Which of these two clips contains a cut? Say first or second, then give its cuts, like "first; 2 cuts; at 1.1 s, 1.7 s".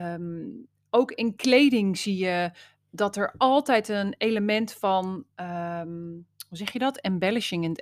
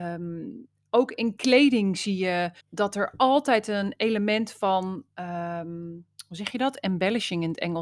second; 1 cut; at 2.6 s